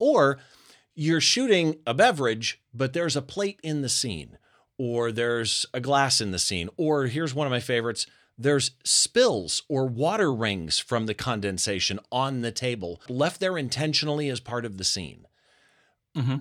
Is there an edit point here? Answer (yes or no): yes